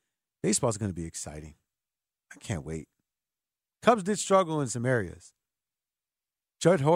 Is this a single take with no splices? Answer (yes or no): yes